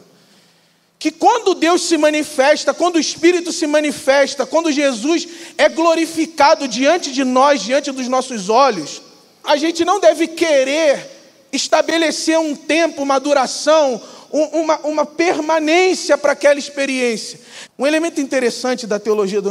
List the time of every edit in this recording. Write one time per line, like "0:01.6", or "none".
0:09.4
0:17.7